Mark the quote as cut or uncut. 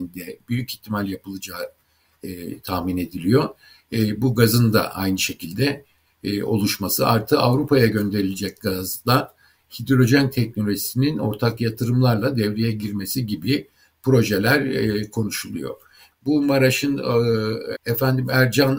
cut